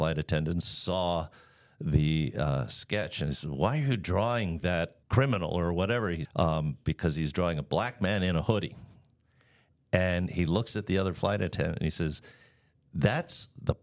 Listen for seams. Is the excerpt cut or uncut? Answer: cut